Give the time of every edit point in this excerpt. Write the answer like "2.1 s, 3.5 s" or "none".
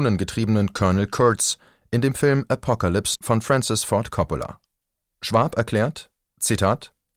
3.2 s